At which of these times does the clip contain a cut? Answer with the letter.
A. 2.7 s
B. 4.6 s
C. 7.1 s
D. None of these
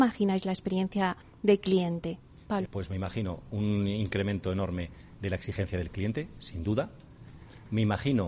A